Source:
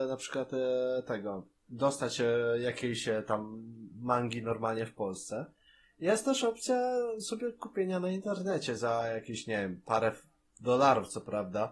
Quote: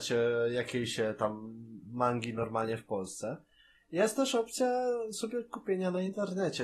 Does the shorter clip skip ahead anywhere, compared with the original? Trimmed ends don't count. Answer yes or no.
no